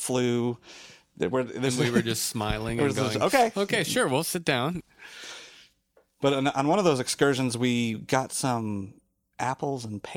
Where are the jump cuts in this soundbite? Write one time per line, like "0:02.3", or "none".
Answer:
none